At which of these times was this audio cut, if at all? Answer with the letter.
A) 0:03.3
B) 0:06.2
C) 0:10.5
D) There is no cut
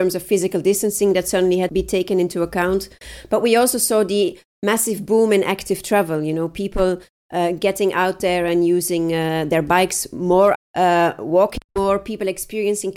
C